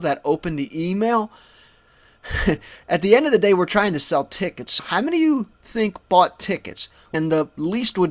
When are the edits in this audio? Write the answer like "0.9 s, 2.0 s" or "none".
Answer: 4.8 s, 7.1 s